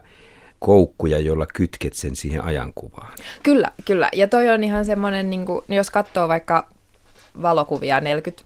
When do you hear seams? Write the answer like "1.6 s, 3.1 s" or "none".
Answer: none